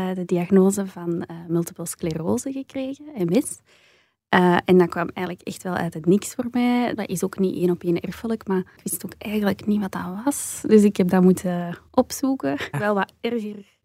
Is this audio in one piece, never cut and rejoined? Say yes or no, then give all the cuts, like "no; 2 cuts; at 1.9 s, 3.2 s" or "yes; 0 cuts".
no; 2 cuts; at 7.0 s, 12.7 s